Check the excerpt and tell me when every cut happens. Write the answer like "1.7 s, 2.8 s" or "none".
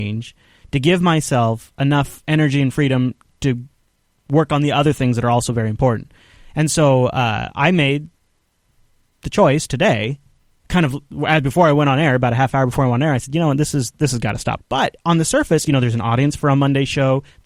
14.6 s, 15.7 s